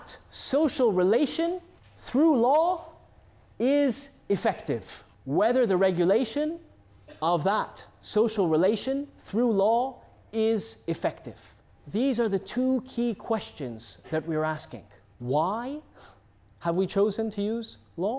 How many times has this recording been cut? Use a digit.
0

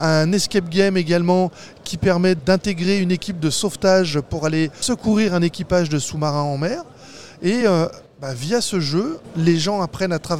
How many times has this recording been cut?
0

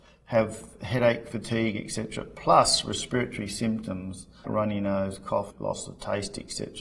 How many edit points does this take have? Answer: 2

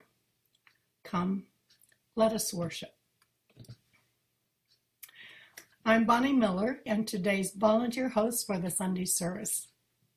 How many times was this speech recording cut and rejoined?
2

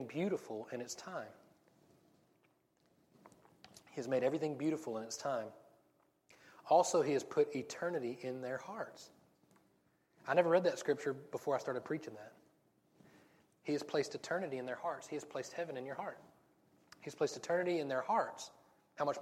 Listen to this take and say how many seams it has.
1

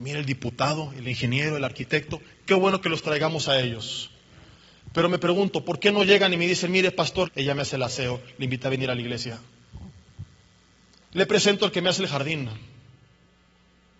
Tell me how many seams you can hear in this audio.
1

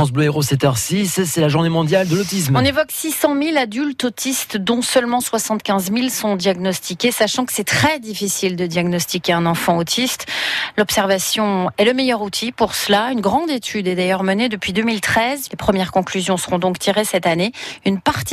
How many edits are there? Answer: 1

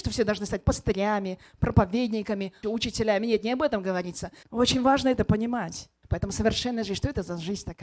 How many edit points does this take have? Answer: 3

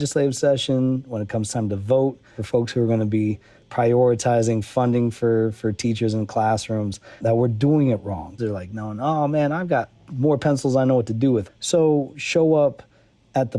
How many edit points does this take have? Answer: 3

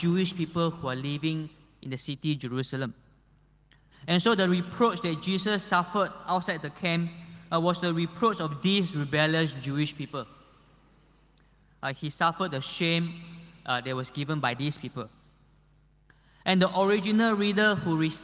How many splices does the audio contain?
1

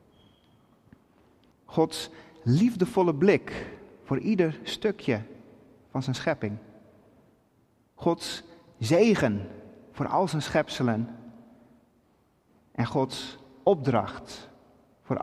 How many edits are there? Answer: 1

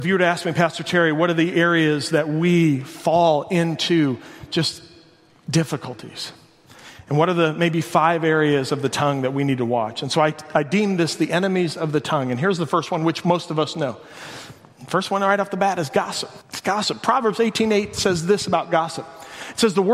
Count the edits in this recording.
1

